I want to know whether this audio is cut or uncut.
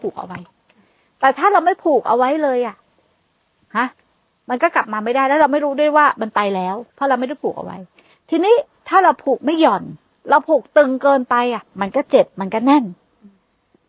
cut